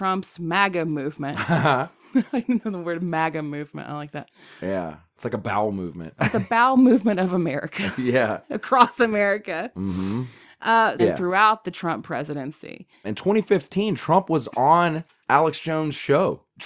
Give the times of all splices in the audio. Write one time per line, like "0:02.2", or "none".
0:06.2
0:11.0
0:13.0